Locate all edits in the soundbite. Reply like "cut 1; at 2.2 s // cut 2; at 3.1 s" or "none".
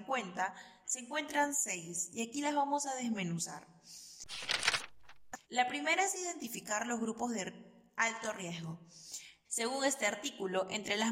cut 1; at 5.4 s // cut 2; at 9.4 s